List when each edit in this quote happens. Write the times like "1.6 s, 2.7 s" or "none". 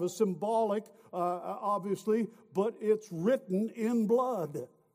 none